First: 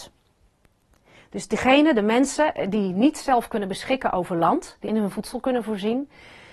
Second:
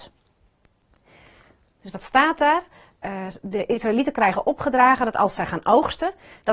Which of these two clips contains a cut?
first; 2 cuts; at 1.1 s, 4.8 s

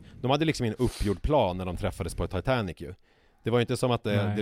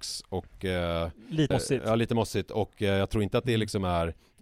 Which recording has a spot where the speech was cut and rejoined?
second; 1 cut; at 1.5 s

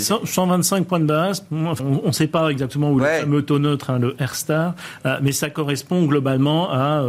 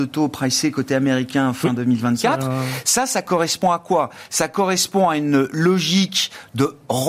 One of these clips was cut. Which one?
first; 1 cut; at 1.8 s

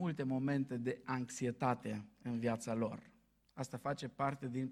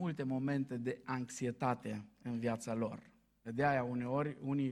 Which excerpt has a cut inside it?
second; 1 cut; at 3.4 s

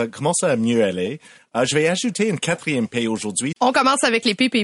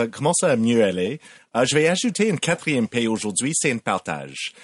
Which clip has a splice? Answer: first; 1 cut; at 3.5 s

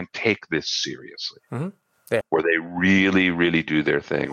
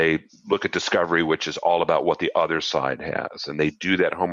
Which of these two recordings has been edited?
first; 1 cut; at 2.2 s

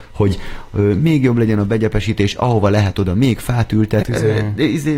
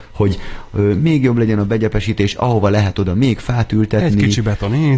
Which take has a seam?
first; 1 cut; at 4.0 s

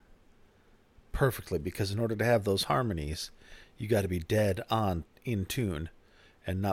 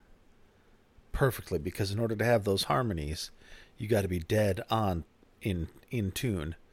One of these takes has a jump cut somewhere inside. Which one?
first; 1 cut; at 5.1 s

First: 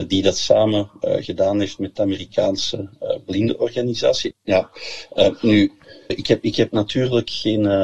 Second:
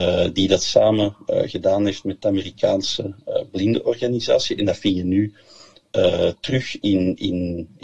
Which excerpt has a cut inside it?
first; 2 cuts; at 4.3 s, 6.1 s

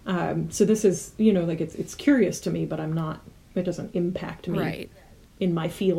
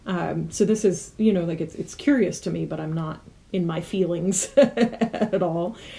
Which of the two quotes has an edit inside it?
second; 1 cut; at 3.4 s

